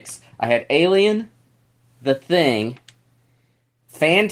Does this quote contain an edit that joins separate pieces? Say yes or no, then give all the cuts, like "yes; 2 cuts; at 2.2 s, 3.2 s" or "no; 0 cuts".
no; 0 cuts